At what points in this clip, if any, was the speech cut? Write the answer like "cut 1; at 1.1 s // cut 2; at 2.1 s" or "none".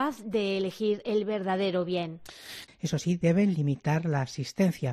cut 1; at 2.7 s